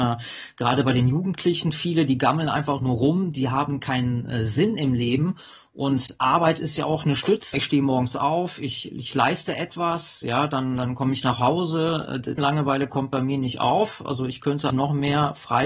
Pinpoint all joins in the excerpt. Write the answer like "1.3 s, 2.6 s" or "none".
7.5 s, 12.4 s, 14.7 s